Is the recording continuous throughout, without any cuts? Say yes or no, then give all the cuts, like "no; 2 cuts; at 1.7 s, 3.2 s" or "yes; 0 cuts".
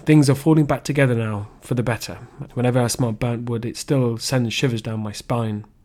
no; 1 cut; at 2.5 s